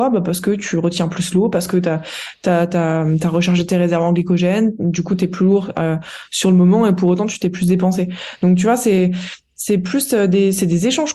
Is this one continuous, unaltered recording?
yes; 0 cuts

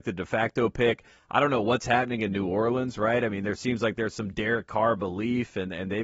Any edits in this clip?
no; 0 cuts

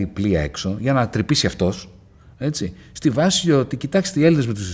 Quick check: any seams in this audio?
no; 0 cuts

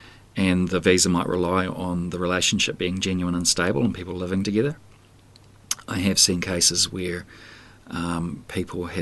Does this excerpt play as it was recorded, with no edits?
yes; 0 cuts

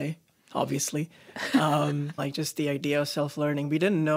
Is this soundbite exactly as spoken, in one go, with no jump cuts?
no; 1 cut; at 2.2 s

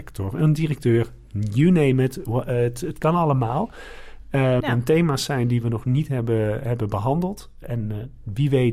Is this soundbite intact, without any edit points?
no; 2 cuts; at 4.6 s, 7.6 s

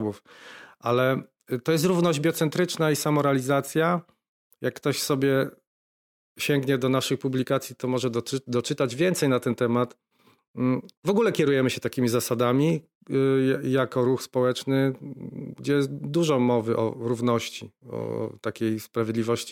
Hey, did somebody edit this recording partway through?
yes; 1 cut; at 10.9 s

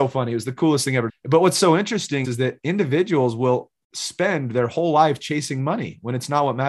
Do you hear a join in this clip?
yes; 2 cuts; at 1.1 s, 2.2 s

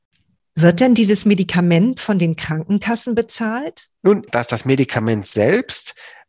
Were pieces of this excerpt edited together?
yes; 1 cut; at 4.3 s

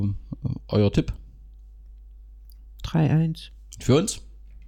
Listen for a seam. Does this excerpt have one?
no; 0 cuts

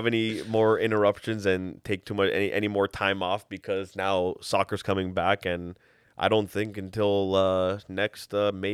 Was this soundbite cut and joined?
no; 0 cuts

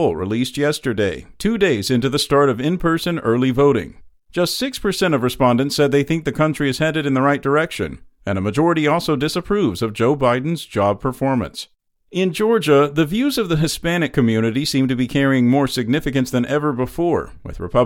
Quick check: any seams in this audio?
no; 0 cuts

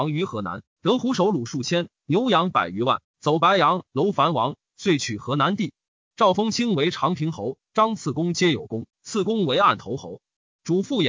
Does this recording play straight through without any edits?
no; 2 cuts; at 7.7 s, 8.9 s

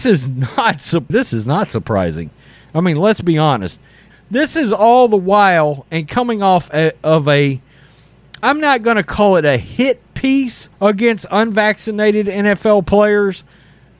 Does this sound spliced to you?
yes; 3 cuts; at 1.1 s, 4.1 s, 10.7 s

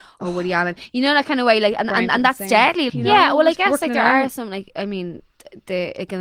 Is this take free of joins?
no; 1 cut; at 2.9 s

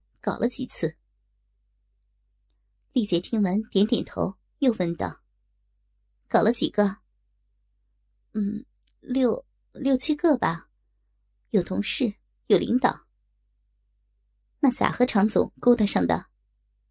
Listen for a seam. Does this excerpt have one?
no; 0 cuts

